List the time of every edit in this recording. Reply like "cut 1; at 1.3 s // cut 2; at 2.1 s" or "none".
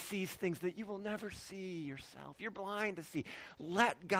none